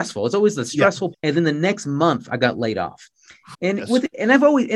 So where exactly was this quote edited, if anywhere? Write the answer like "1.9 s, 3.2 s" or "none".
1.1 s, 3.5 s